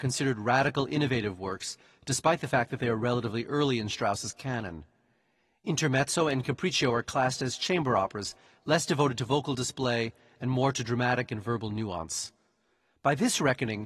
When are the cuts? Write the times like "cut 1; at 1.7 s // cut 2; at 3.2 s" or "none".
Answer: none